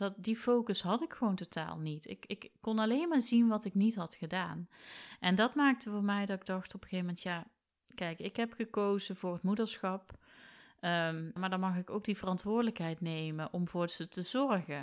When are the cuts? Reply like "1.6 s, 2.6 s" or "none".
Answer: 11.4 s